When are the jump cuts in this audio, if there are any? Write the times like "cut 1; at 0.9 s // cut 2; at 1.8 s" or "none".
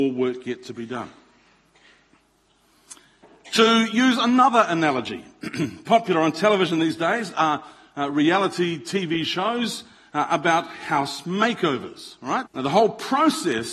cut 1; at 12.4 s